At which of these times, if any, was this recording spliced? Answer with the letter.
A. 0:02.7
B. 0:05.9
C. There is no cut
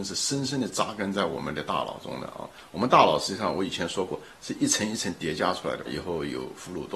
B